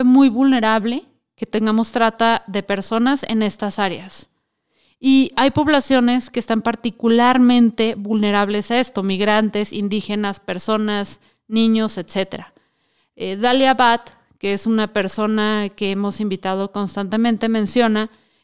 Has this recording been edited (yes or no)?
no